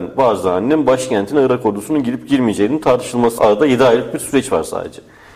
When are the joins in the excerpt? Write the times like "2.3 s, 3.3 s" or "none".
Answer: 3.4 s